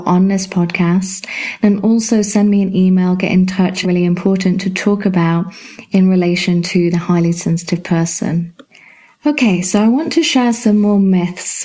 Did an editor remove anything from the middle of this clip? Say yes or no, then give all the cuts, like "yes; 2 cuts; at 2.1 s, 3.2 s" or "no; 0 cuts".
yes; 1 cut; at 3.8 s